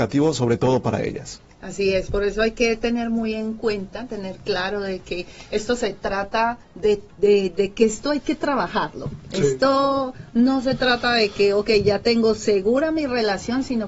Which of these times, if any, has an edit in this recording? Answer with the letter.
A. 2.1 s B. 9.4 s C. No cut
C